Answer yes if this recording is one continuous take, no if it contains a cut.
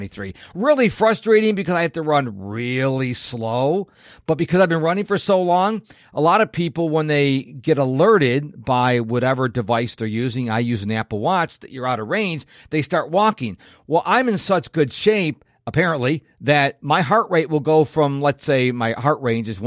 yes